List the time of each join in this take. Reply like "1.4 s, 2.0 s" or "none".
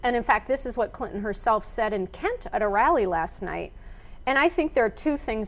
2.5 s